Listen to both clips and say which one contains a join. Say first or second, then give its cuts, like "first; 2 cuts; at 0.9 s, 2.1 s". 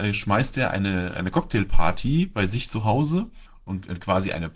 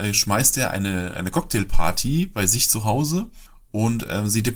first; 1 cut; at 3.7 s